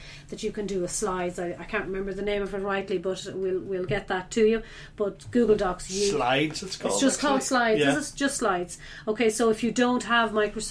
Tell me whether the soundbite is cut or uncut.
uncut